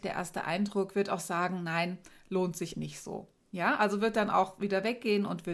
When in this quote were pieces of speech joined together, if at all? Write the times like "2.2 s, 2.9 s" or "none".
2.7 s